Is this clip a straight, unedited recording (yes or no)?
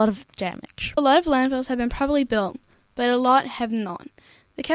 yes